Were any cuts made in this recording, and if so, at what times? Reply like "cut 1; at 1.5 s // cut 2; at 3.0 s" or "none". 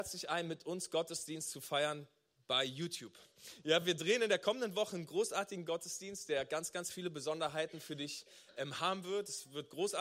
none